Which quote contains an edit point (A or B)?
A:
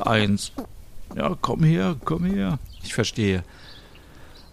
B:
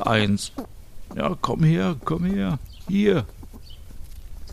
A